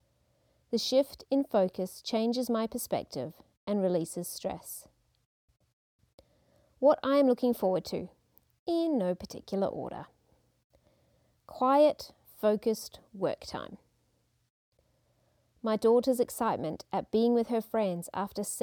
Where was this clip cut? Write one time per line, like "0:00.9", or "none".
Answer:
none